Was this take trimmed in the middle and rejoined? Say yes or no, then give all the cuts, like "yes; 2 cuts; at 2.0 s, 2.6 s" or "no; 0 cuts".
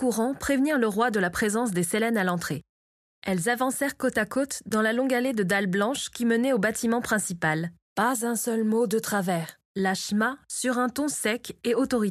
yes; 2 cuts; at 7.8 s, 9.7 s